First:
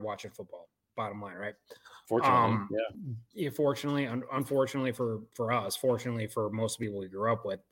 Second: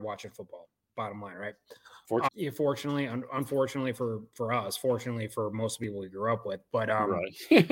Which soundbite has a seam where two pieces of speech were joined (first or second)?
second